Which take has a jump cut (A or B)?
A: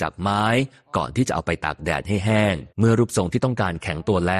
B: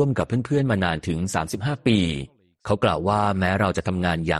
A